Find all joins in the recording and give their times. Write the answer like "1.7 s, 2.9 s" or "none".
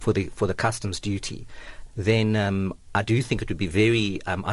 1.9 s